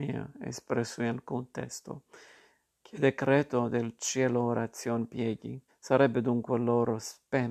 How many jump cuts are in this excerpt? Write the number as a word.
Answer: one